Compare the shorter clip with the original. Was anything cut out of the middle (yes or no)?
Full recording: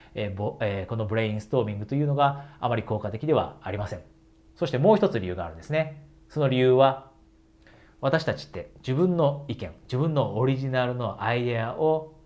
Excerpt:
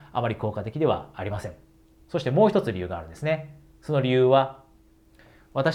no